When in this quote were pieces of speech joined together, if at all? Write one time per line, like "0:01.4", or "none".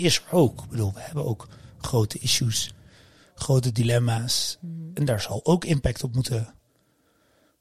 none